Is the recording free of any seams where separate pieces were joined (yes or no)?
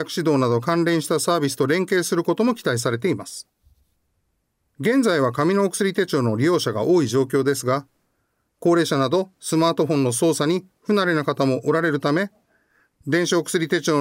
yes